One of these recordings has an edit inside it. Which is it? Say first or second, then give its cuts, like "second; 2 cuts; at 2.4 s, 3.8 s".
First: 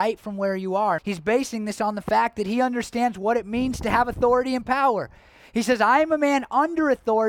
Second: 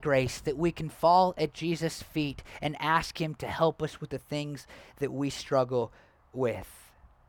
first; 1 cut; at 1.0 s